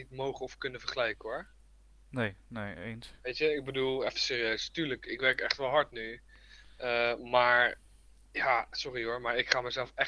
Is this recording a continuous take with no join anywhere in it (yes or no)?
yes